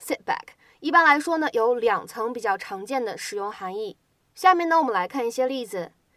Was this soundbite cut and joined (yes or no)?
yes